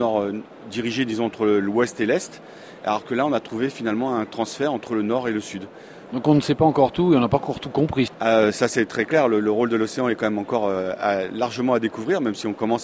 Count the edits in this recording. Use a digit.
1